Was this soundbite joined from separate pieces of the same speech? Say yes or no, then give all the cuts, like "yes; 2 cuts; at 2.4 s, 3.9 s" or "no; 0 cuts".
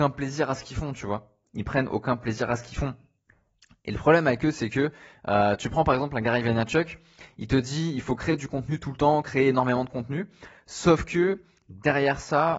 no; 0 cuts